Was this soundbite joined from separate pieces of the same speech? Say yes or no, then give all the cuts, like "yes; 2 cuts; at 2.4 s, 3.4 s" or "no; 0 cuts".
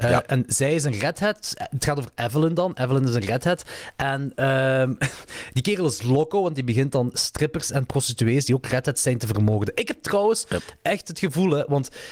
no; 0 cuts